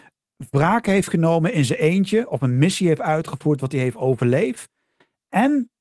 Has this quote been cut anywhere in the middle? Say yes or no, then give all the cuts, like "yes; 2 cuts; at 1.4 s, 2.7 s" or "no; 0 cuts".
no; 0 cuts